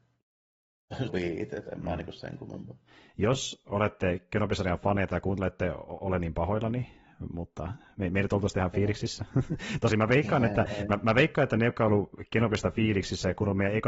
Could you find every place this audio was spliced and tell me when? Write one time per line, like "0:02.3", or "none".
0:01.1